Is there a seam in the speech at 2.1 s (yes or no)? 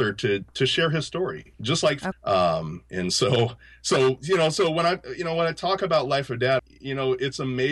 yes